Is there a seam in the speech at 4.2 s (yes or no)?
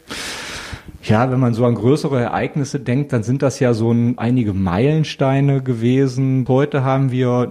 yes